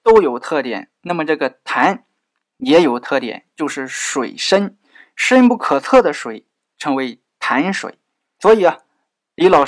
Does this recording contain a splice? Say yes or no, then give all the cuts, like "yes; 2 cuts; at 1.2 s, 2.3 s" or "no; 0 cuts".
no; 0 cuts